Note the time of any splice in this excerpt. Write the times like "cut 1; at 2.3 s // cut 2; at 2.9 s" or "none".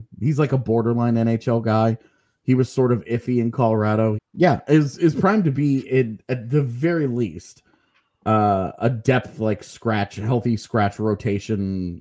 cut 1; at 4.1 s